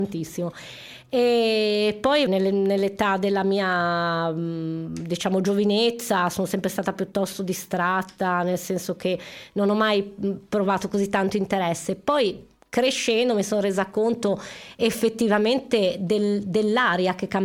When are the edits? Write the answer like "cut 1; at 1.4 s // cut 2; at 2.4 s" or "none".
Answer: cut 1; at 2.3 s